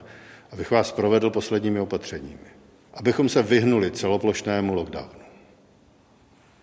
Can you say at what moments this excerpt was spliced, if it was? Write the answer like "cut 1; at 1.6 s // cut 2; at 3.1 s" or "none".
cut 1; at 2.9 s